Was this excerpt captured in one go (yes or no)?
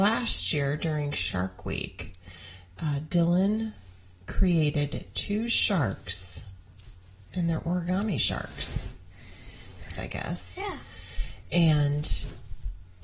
no